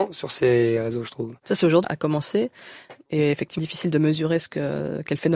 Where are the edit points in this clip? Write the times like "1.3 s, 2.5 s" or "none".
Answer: 1.8 s, 3.6 s